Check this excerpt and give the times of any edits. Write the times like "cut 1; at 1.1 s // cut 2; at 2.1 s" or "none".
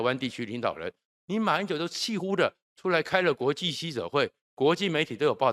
cut 1; at 2.2 s